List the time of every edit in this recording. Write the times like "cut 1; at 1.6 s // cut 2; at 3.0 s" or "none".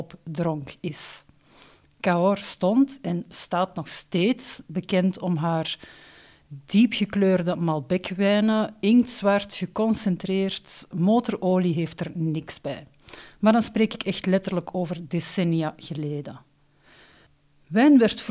cut 1; at 10.9 s